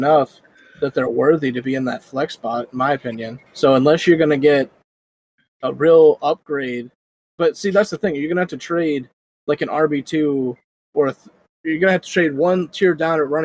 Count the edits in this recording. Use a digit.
1